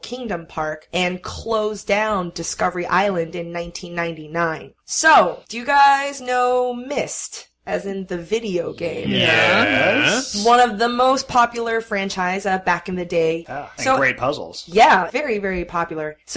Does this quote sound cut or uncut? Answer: cut